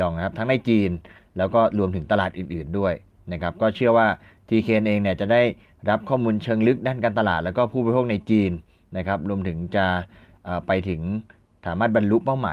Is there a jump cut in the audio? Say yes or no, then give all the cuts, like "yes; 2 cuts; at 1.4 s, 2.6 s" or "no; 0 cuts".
no; 0 cuts